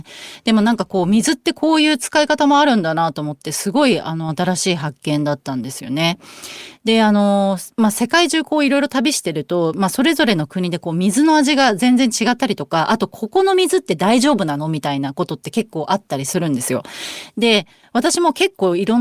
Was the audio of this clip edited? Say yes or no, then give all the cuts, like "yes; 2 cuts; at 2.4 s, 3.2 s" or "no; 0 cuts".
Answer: no; 0 cuts